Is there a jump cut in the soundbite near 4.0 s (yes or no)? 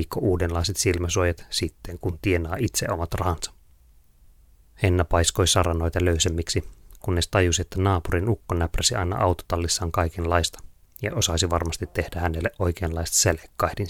no